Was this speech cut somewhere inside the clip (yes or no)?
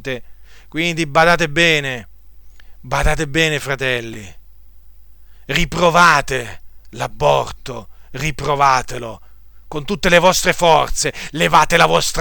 no